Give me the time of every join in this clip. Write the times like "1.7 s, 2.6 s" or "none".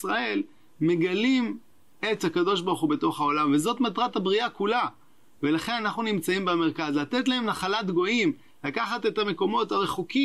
none